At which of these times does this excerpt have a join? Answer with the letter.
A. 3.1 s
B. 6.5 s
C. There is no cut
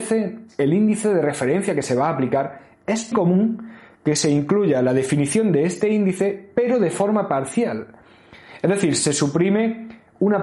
A